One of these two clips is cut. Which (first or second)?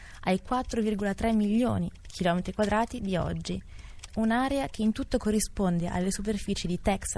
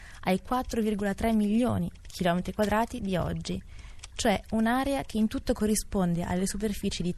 first